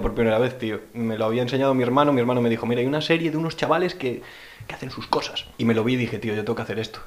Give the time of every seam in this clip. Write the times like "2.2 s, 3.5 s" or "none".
5.5 s